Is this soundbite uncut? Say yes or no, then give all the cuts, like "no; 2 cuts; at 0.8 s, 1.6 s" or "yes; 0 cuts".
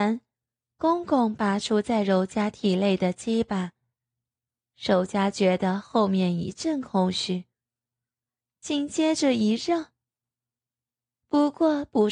yes; 0 cuts